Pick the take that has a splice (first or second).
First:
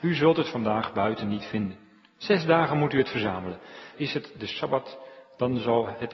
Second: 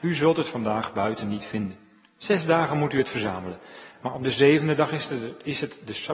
first